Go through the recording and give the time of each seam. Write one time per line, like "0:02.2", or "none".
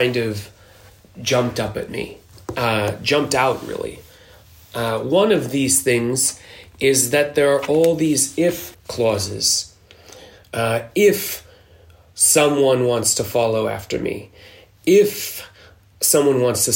0:08.7